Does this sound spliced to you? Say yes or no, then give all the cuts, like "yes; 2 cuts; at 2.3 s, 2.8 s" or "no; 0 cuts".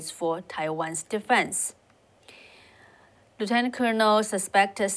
yes; 1 cut; at 3.3 s